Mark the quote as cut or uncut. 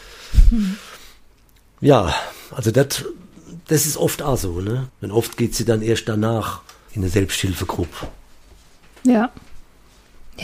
cut